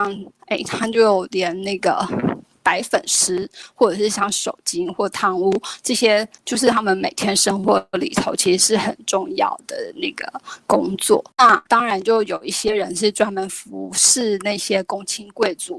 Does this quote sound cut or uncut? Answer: cut